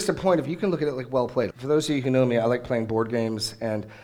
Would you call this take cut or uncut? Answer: cut